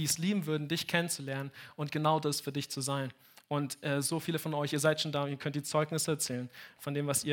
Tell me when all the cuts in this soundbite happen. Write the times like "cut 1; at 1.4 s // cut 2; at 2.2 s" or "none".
none